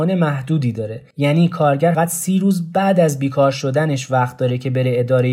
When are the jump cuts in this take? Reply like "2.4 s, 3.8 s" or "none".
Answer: 1.9 s

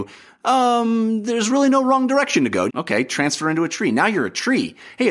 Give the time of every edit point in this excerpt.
2.7 s

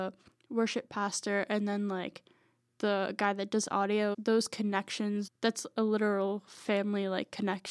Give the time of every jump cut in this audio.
4.1 s, 5.3 s

